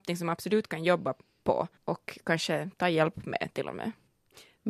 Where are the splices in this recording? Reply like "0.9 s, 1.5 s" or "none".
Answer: 1.8 s